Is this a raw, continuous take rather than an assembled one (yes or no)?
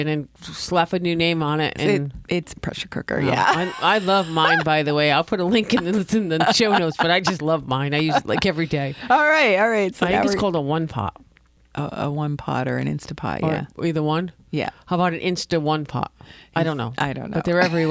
no